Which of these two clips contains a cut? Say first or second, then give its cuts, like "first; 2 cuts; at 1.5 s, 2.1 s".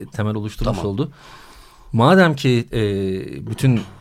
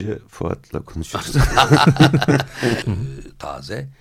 second; 1 cut; at 2.8 s